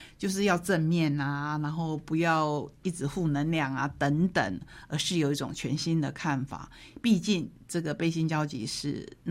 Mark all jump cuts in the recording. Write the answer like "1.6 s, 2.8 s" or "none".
none